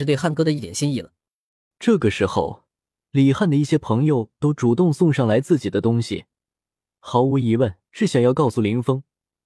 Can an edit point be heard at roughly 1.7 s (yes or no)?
yes